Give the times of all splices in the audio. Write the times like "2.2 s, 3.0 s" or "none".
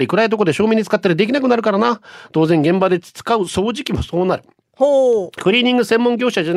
none